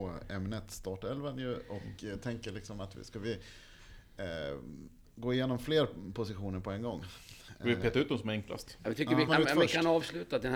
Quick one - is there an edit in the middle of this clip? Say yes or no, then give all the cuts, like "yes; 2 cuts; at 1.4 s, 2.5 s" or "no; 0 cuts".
yes; 1 cut; at 9.3 s